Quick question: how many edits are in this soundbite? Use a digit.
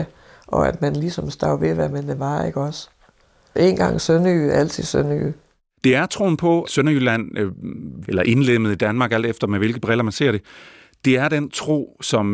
2